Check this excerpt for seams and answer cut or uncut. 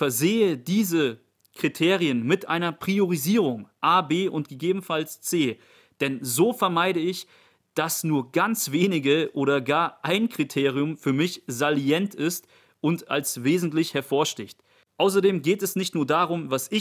uncut